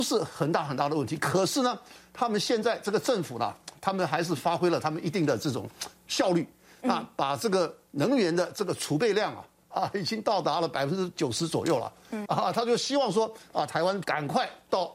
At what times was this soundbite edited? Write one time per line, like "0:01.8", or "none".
0:12.3
0:14.0